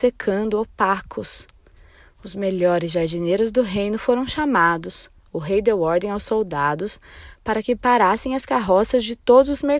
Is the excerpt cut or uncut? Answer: uncut